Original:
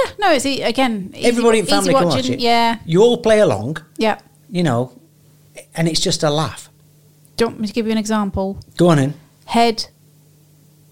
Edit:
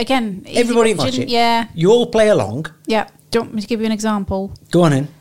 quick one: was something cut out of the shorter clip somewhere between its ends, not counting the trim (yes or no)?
yes